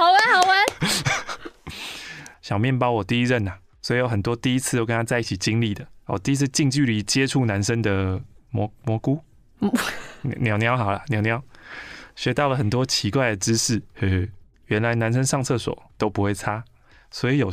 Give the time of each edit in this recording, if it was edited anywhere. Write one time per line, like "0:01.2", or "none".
0:02.3
0:14.5